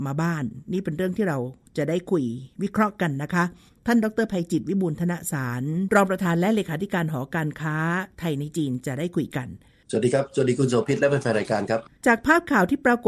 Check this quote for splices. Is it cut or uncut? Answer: uncut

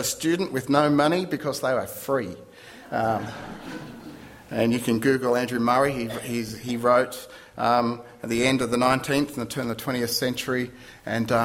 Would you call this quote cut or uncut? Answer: uncut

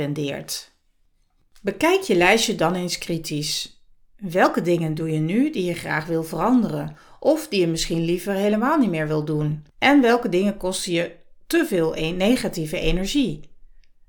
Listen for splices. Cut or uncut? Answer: cut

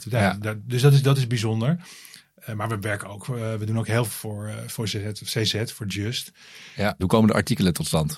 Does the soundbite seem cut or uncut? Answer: cut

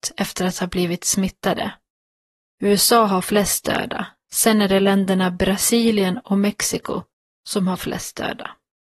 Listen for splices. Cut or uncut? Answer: uncut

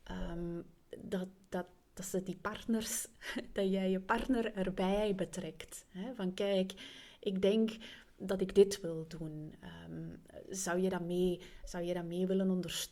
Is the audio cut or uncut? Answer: uncut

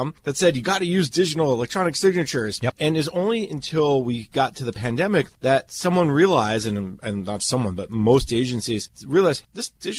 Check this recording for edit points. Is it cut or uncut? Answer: cut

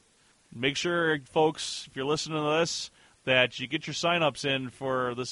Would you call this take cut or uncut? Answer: uncut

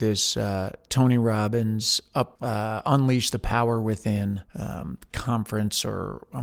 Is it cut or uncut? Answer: cut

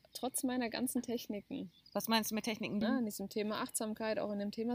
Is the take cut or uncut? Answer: cut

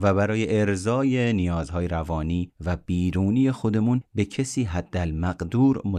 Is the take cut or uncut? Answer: uncut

